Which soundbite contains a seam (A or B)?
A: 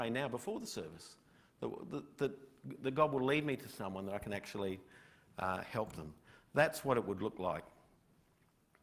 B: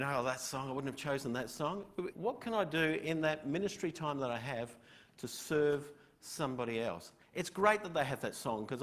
B